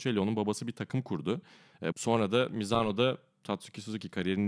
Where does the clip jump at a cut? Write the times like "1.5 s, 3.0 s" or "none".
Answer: 1.9 s

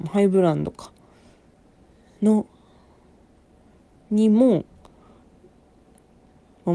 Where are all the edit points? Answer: none

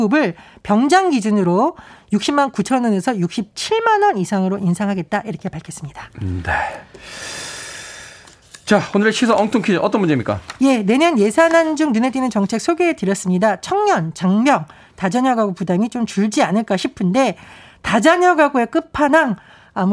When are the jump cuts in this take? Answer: none

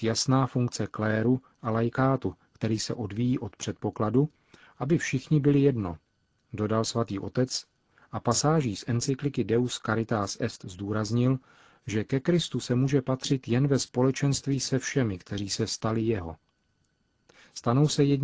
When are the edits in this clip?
none

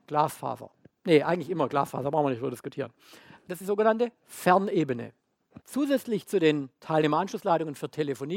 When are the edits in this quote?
3.6 s, 5.6 s

